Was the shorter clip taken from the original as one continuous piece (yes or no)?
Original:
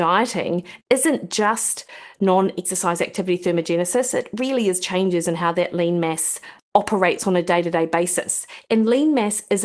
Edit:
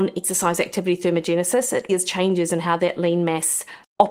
no